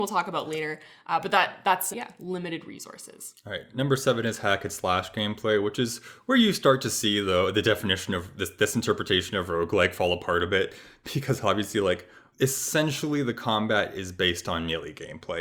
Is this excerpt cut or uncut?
cut